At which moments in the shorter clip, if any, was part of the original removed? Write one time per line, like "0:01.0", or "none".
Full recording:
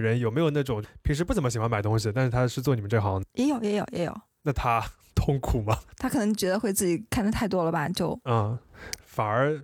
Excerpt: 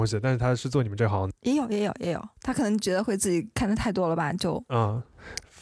0:02.4